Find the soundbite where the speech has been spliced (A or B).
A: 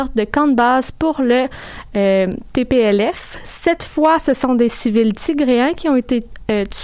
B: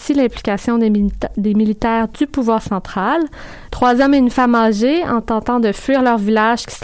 B